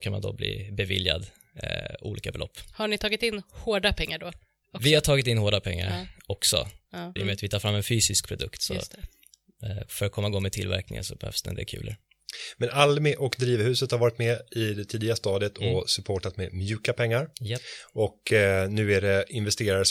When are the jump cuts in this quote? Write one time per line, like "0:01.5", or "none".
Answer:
0:07.2